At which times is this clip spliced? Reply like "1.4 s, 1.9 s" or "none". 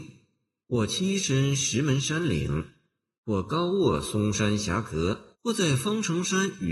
5.3 s